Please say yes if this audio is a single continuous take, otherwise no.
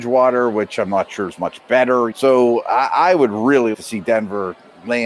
no